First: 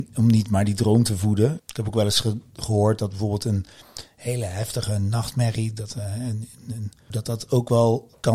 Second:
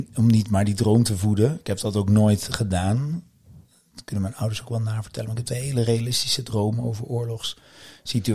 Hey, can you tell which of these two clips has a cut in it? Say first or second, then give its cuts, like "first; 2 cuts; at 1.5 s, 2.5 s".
first; 2 cuts; at 1.6 s, 7.1 s